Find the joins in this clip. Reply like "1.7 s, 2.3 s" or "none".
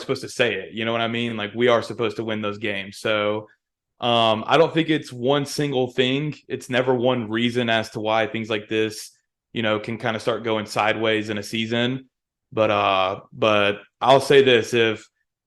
none